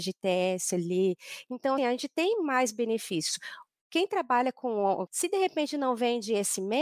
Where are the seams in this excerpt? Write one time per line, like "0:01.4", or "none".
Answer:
0:01.8
0:05.1